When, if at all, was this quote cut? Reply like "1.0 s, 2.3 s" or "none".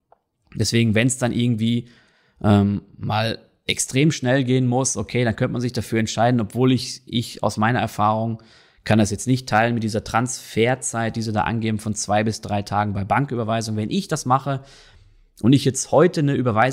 none